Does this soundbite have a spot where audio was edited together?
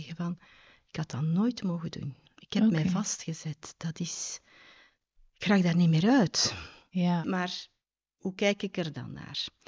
yes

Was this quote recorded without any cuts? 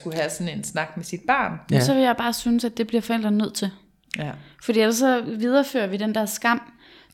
yes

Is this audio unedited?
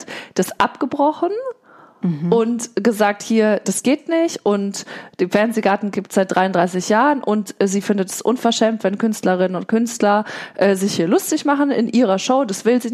yes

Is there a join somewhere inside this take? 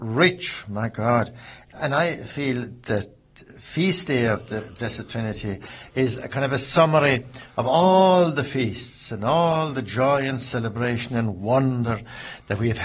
no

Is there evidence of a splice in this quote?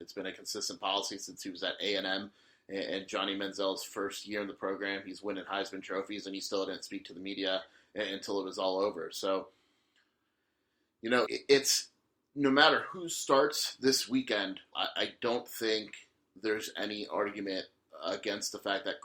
yes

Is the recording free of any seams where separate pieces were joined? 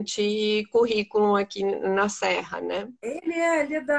yes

